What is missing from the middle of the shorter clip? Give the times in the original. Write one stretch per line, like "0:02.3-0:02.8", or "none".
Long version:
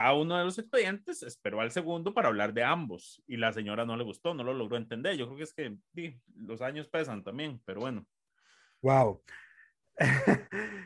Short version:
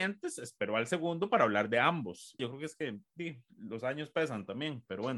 0:03.2-0:05.2